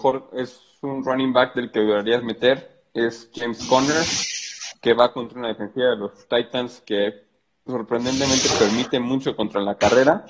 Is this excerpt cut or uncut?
uncut